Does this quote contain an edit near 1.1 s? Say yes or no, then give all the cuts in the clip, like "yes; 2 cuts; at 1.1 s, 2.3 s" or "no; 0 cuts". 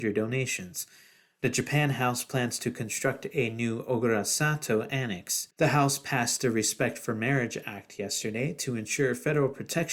no; 1 cut; at 5.5 s